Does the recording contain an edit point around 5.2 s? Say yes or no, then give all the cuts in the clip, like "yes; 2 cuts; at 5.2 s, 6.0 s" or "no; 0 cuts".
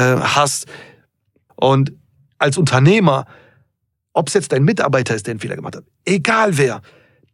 no; 1 cut; at 1.5 s